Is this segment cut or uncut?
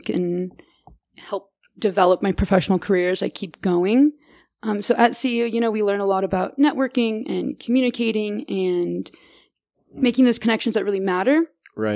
uncut